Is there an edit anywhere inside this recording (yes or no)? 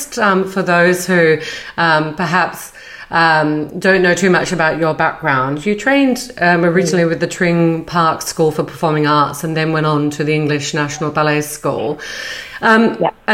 no